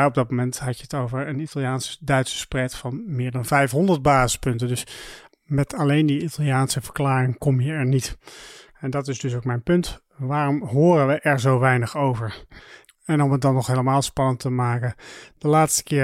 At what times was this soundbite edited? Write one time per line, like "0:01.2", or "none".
none